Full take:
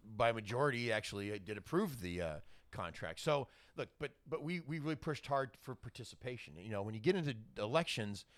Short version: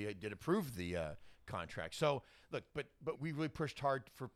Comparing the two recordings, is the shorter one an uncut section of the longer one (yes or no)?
no